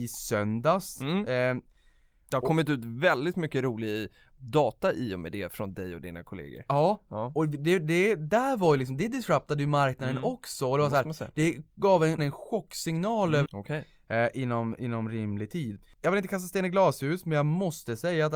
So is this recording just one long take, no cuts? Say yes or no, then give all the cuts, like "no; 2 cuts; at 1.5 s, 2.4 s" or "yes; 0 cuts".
no; 2 cuts; at 12.2 s, 13.5 s